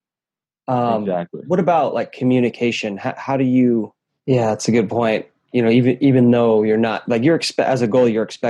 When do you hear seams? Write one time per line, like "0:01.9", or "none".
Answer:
0:04.1